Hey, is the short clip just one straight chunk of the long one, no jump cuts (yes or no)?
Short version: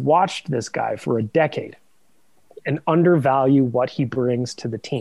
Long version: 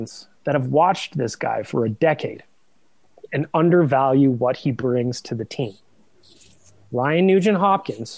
yes